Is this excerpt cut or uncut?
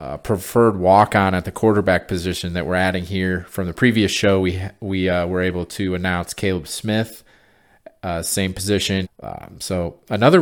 cut